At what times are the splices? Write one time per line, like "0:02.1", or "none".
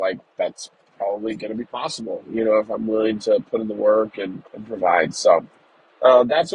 0:04.5